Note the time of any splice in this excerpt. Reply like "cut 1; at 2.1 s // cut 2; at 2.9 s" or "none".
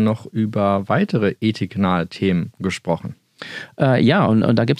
none